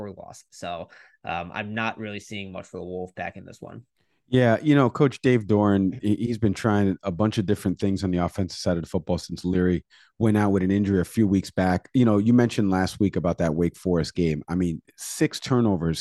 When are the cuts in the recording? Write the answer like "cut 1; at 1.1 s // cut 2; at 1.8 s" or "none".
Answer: none